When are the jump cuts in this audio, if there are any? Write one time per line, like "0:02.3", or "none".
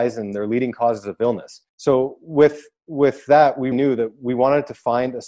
0:01.7
0:03.7